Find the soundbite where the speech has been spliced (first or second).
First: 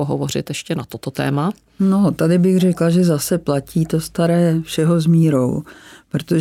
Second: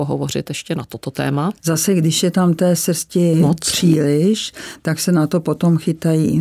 second